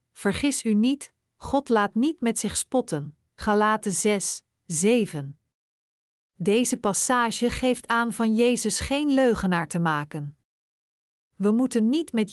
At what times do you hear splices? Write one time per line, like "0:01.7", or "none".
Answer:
0:03.3